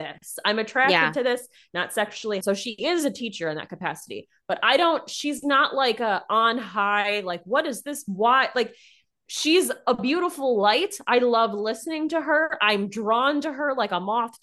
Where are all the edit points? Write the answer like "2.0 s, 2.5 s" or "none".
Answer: 2.4 s